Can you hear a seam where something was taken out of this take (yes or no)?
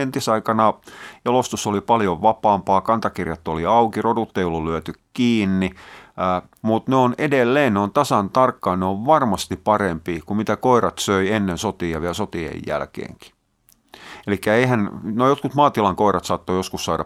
yes